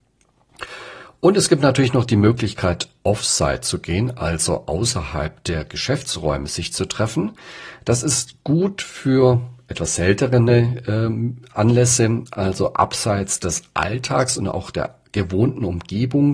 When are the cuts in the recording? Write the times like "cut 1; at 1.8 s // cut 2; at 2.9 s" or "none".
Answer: none